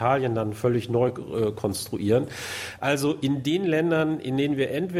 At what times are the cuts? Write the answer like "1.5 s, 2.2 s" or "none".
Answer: none